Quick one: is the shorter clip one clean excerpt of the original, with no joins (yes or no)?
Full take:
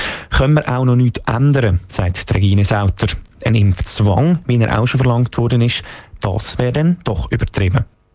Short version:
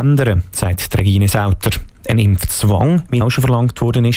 no